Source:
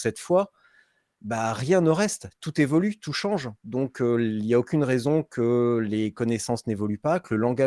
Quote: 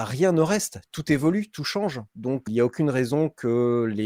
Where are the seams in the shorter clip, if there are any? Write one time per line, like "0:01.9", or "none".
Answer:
0:02.5